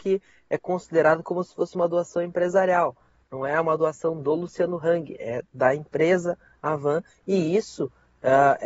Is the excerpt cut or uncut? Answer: uncut